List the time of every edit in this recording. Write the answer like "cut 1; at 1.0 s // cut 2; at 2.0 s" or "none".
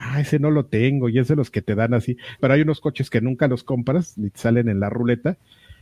cut 1; at 2.4 s

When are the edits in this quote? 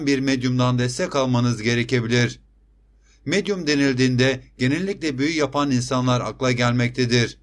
none

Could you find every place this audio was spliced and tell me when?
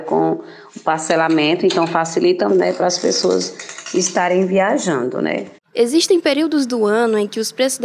cut 1; at 2.5 s

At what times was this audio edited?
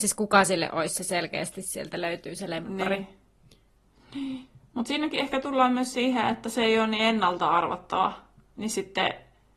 none

